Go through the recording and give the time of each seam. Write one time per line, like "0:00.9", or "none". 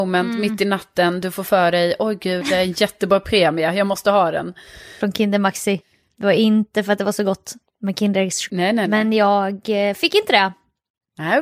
0:05.0
0:08.5